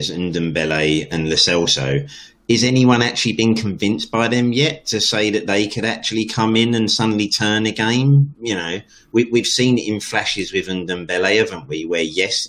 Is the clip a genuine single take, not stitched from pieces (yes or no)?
yes